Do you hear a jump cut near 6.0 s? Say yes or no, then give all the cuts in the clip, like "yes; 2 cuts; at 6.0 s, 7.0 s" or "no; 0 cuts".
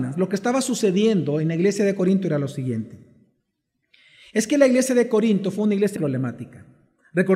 yes; 1 cut; at 6.0 s